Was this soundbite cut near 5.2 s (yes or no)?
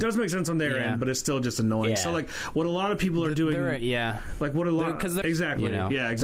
yes